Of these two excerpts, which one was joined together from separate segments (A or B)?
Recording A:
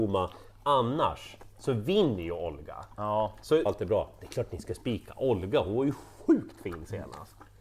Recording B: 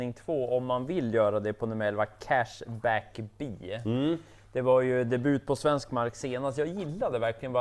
A